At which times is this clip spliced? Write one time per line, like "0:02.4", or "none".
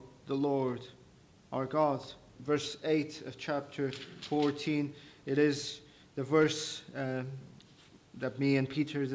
0:02.4